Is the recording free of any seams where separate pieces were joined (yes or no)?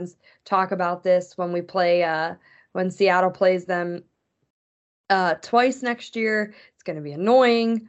yes